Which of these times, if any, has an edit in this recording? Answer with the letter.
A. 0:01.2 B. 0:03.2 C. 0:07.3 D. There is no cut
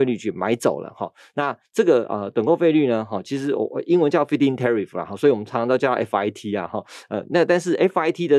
D